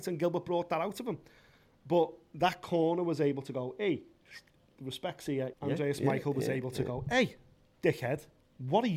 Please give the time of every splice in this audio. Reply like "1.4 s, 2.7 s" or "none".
5.5 s